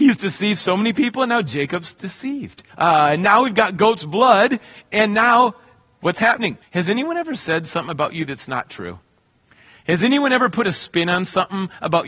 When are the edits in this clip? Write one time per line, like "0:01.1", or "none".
0:02.7
0:06.6